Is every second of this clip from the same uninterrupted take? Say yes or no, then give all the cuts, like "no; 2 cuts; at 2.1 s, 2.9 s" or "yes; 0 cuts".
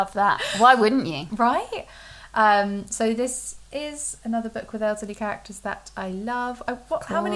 yes; 0 cuts